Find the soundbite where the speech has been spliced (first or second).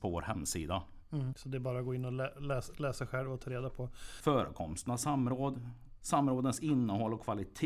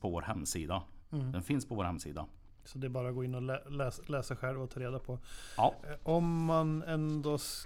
first